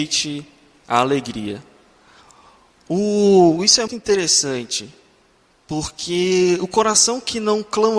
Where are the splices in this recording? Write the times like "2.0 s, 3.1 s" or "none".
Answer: 3.9 s